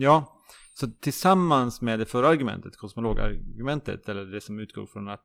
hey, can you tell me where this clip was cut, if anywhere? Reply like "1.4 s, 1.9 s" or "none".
none